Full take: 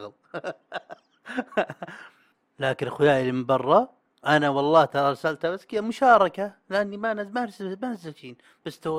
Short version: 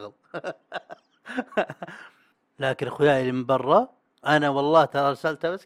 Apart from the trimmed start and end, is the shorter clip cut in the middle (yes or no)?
no